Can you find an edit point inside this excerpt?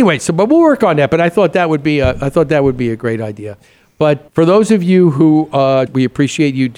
yes; 2 cuts; at 4.3 s, 5.9 s

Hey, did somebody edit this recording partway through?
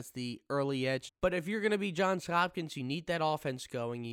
yes; 1 cut; at 1.1 s

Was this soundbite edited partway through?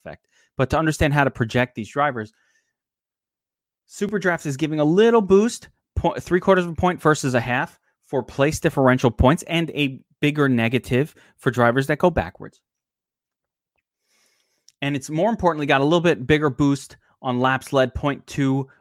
no; 0 cuts

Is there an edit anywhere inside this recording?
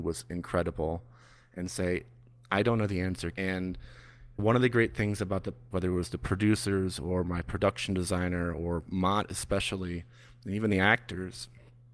yes; 2 cuts; at 3.3 s, 5.7 s

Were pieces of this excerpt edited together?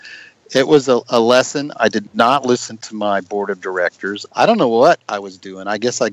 yes; 2 cuts; at 1.7 s, 4.3 s

